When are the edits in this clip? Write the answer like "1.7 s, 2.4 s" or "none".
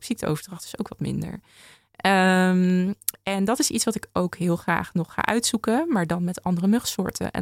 none